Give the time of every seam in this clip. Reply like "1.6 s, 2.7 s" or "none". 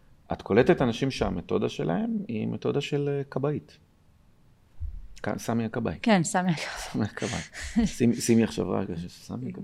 none